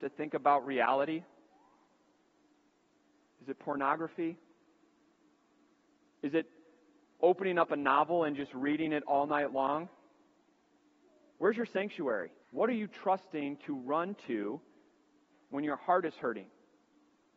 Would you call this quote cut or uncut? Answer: cut